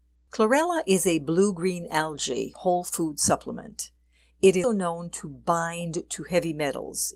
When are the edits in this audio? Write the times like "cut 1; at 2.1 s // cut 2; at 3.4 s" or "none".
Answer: cut 1; at 4.6 s